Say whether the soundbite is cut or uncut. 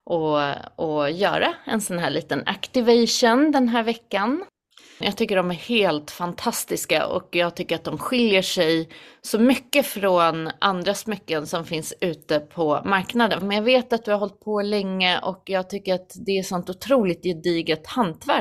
cut